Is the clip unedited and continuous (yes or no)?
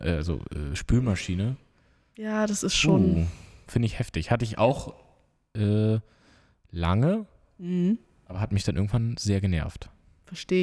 yes